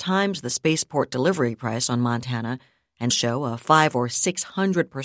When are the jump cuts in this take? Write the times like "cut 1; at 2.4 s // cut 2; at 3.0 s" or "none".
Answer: cut 1; at 3.1 s